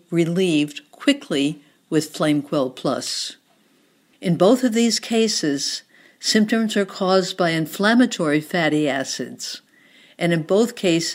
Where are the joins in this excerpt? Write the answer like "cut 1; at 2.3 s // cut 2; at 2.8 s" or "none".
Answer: cut 1; at 4.1 s